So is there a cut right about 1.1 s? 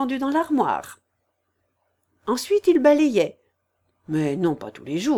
no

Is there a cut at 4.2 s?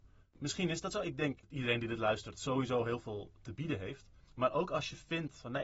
no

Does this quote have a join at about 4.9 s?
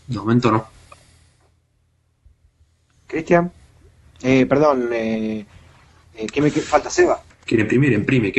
no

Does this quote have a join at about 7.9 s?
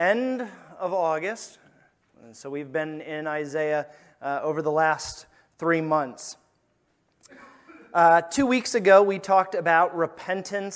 no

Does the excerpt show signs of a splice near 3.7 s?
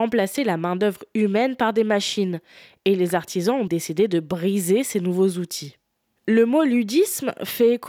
yes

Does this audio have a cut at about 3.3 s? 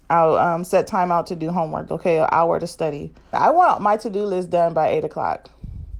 yes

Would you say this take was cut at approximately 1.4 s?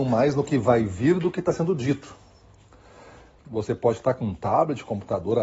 no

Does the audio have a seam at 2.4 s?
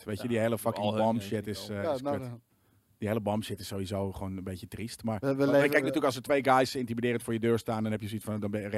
no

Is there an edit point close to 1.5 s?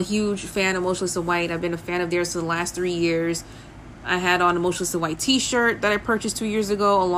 no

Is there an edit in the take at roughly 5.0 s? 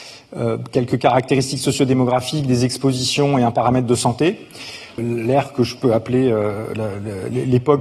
yes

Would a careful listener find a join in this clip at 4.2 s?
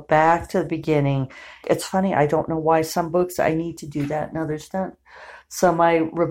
no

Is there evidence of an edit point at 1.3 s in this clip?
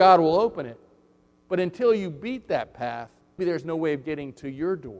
no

